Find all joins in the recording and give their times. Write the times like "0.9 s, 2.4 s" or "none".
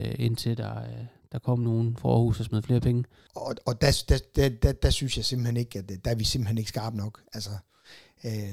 3.3 s